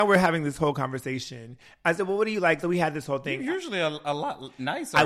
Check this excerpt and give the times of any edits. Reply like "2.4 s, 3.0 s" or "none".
none